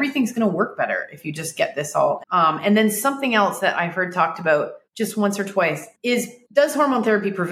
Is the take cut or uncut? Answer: cut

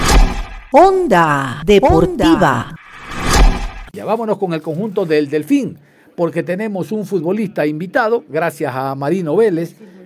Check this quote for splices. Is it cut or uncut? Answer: uncut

